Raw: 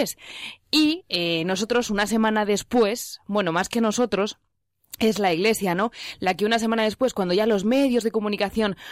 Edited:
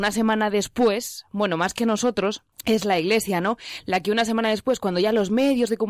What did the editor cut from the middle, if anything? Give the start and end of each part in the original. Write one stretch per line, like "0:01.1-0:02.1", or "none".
0:04.5-0:04.9